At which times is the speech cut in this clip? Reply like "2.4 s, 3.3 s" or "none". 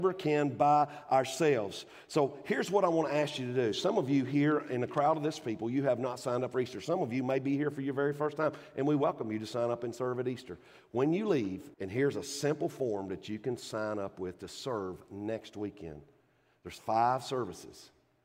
11.7 s